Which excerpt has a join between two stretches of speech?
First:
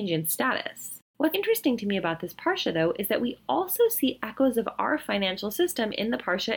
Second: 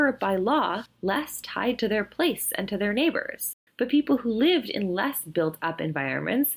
first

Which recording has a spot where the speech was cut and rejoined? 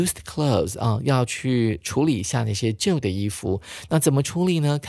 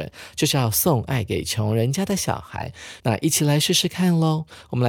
second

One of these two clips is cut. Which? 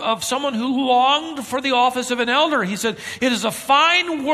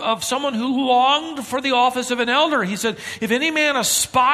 first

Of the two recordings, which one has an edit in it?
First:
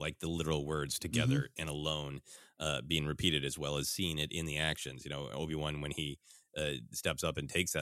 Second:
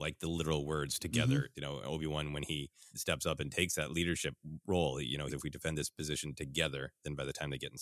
second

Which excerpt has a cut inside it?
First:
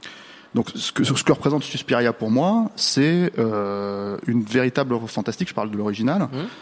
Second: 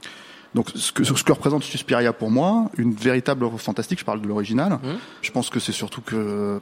second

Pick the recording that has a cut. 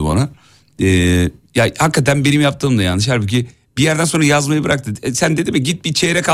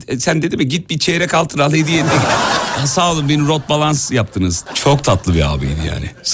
second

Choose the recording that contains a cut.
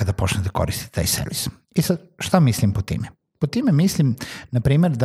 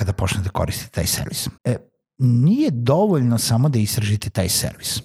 second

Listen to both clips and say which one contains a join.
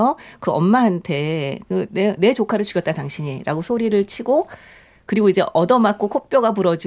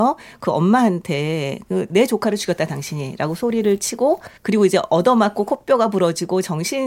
second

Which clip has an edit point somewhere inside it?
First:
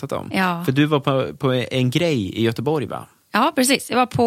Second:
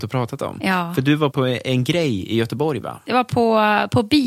second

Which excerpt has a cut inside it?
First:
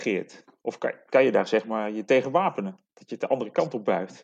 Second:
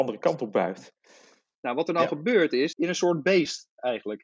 second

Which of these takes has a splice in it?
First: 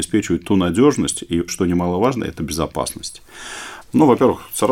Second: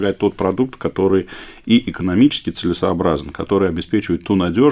first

